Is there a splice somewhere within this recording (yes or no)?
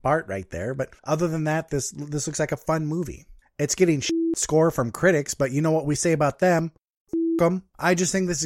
yes